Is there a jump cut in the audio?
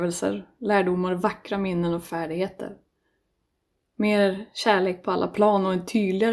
no; 0 cuts

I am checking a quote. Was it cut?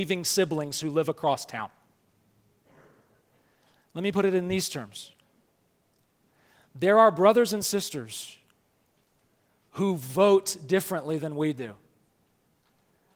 no; 0 cuts

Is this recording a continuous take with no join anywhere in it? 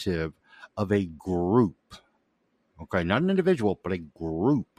yes; 0 cuts

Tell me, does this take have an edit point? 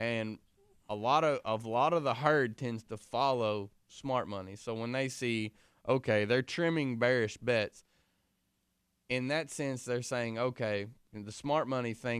no; 0 cuts

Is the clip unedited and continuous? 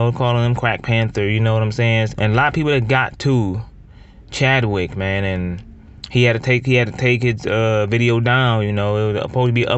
no; 1 cut; at 2.1 s

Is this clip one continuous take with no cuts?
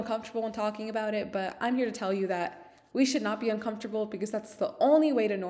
yes; 0 cuts

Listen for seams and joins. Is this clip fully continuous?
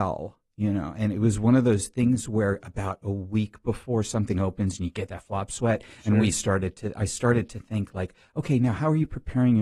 yes; 0 cuts

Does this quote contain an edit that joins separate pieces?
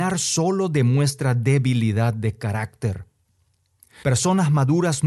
yes; 1 cut; at 4.0 s

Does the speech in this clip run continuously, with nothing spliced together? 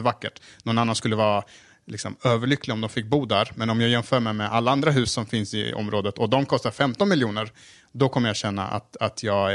yes; 0 cuts

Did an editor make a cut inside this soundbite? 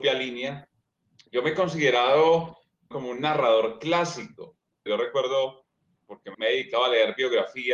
yes; 3 cuts; at 2.9 s, 4.9 s, 6.3 s

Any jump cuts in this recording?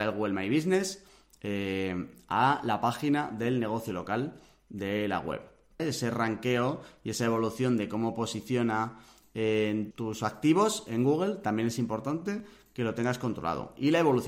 yes; 2 cuts; at 5.8 s, 9.9 s

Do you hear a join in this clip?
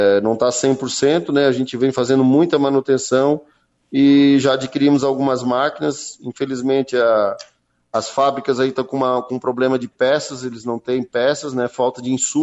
no; 0 cuts

